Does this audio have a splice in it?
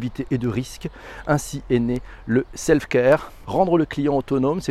yes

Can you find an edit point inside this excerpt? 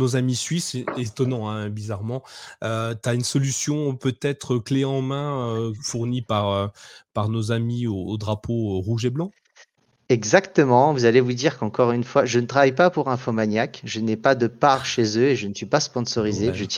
no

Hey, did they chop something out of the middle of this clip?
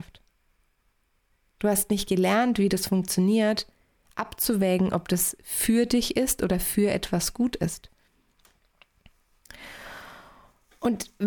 no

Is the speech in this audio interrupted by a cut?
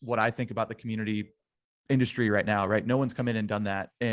no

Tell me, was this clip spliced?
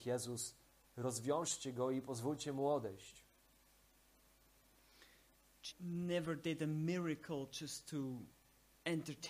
yes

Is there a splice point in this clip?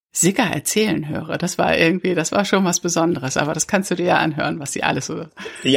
no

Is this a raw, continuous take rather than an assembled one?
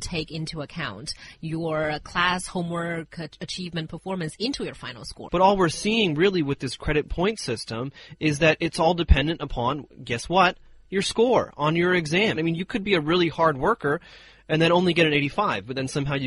no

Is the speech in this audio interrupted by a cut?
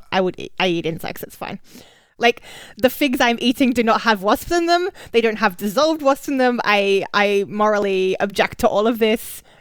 yes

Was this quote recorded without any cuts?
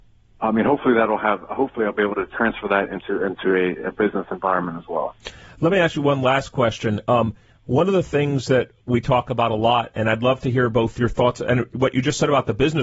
yes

